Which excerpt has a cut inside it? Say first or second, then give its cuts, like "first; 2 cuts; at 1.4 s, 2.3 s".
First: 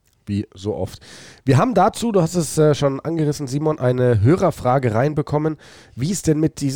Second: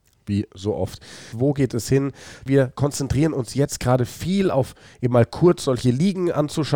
second; 2 cuts; at 1.3 s, 2.5 s